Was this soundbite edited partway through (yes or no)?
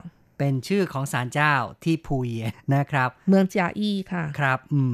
yes